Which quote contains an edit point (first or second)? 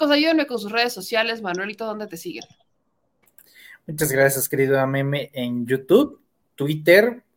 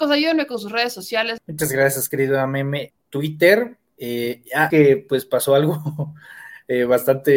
second